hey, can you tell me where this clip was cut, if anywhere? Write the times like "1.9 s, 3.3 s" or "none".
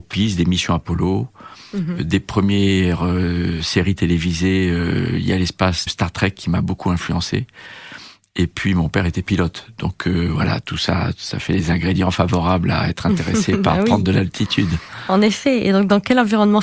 5.9 s